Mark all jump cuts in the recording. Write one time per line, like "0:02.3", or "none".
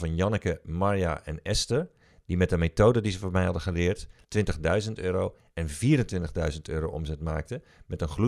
0:04.2